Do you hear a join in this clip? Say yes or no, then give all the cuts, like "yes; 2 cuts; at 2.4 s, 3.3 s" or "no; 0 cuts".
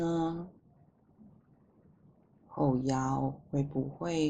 no; 0 cuts